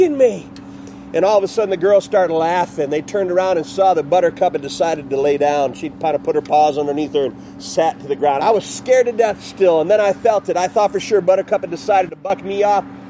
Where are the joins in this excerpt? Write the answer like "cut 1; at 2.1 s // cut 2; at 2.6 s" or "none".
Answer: cut 1; at 8.4 s